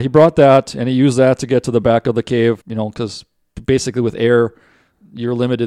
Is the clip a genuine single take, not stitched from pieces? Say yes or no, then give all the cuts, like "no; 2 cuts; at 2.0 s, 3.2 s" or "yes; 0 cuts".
no; 1 cut; at 2.6 s